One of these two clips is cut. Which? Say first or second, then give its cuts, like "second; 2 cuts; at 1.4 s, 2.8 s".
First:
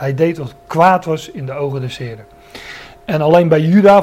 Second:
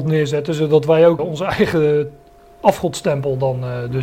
second; 1 cut; at 1.2 s